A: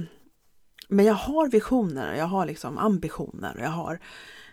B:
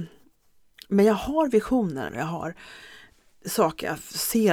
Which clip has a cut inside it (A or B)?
B